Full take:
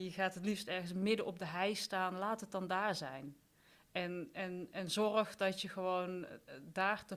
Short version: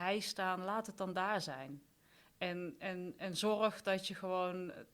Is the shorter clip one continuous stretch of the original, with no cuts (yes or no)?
yes